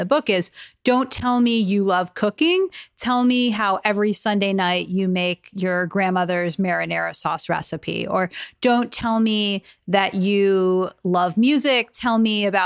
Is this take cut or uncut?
uncut